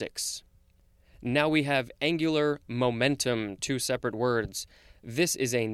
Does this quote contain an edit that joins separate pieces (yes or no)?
no